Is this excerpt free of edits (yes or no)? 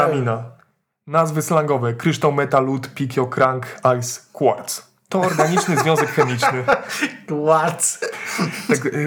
yes